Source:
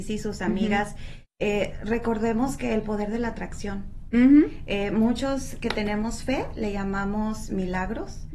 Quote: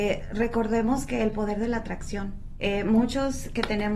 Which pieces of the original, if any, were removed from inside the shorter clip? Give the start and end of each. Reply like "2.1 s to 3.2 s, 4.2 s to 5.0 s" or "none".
4.1 s to 4.7 s